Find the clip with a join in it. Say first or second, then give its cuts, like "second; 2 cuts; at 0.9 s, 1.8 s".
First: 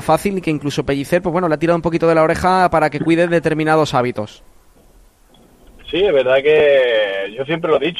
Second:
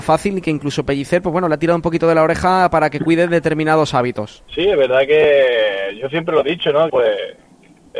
second; 2 cuts; at 4.5 s, 6.9 s